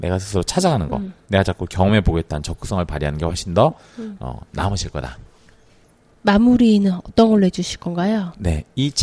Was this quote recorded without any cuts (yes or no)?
yes